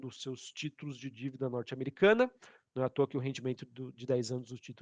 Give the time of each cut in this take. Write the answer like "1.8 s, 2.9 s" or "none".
2.6 s